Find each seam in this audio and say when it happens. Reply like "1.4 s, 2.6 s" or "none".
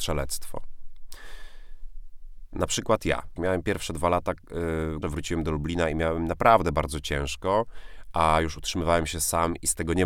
3.4 s, 5.0 s